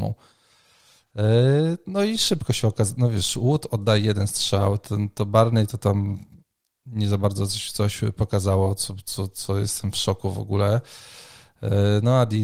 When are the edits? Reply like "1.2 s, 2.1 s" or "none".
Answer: none